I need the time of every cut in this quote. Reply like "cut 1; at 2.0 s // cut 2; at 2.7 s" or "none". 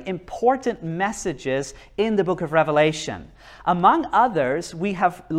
none